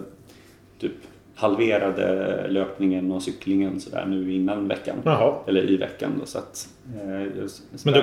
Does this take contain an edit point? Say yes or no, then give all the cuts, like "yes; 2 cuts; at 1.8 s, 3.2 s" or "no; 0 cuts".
no; 0 cuts